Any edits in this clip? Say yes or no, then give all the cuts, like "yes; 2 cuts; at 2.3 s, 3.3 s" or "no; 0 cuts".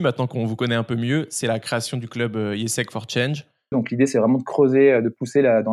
yes; 1 cut; at 3.7 s